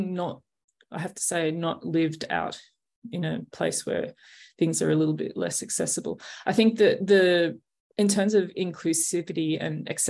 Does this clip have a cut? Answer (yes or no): no